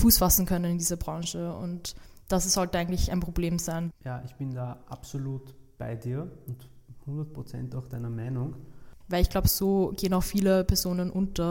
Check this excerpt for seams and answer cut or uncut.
cut